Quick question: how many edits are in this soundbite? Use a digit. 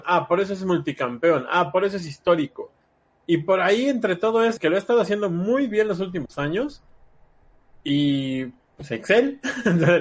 1